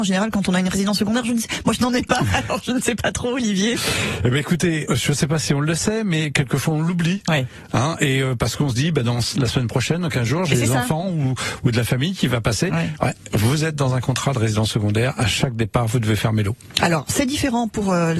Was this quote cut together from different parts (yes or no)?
yes